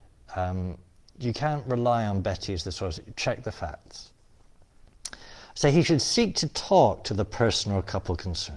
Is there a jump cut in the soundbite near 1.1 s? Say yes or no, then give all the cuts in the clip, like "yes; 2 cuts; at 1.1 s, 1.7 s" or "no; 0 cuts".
yes; 1 cut; at 1.1 s